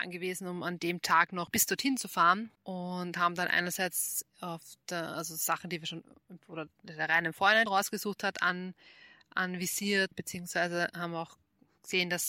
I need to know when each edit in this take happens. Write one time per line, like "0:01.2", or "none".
0:02.6
0:07.7
0:10.1